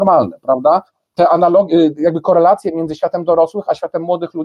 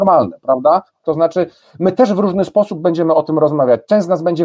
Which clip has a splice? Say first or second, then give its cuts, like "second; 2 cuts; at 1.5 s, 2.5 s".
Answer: second; 1 cut; at 1.0 s